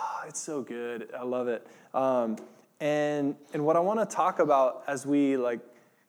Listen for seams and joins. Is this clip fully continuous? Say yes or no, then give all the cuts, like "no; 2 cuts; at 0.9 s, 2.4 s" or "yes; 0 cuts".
yes; 0 cuts